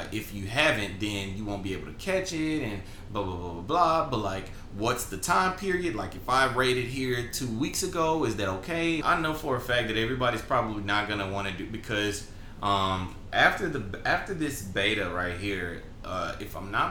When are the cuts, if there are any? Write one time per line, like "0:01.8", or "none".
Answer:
0:09.0

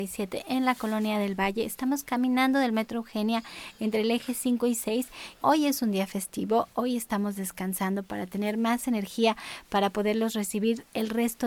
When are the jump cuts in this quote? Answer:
0:05.4

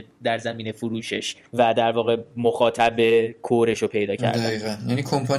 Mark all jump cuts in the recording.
0:01.5

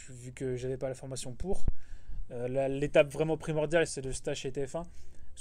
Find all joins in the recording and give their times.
0:02.3
0:03.9

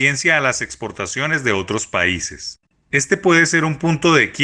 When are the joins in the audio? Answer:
none

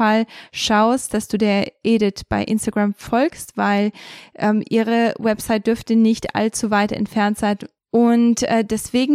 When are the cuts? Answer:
0:07.7

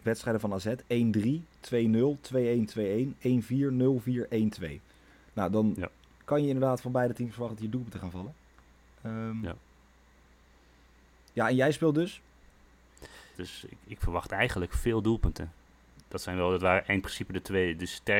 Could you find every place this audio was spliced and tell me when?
0:13.3
0:15.9

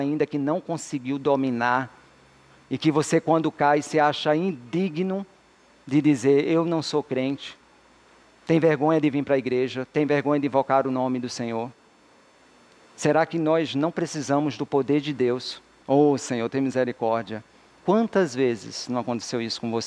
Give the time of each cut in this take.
0:15.8

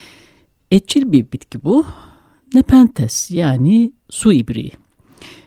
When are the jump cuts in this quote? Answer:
none

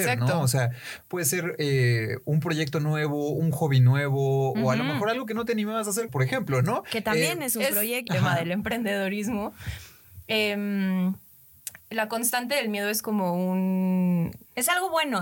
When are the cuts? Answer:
0:06.1
0:08.1

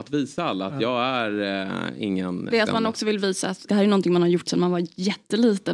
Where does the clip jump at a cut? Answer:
0:02.5
0:03.7

